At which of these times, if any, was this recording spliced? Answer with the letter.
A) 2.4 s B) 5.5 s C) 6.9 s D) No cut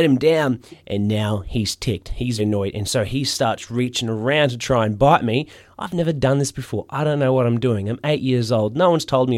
A